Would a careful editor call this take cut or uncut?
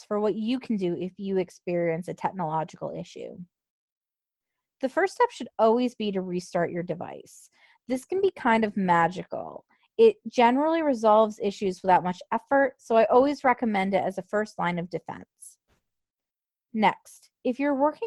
uncut